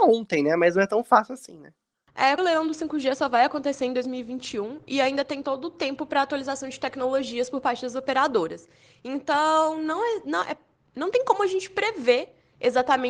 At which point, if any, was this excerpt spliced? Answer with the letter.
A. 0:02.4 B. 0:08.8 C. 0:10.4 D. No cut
A